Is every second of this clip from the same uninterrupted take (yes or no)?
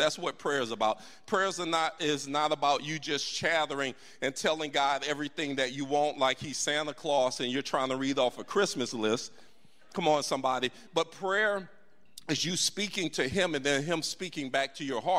yes